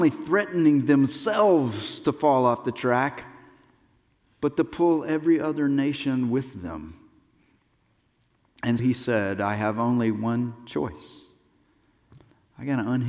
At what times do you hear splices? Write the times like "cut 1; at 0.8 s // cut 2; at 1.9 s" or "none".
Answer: cut 1; at 8.8 s